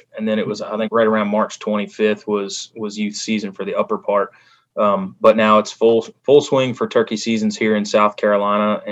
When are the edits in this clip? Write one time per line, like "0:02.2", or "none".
none